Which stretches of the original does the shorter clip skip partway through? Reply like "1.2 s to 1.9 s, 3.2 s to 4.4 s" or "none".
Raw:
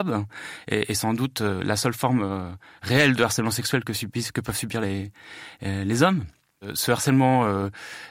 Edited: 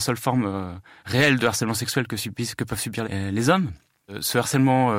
4.8 s to 5.6 s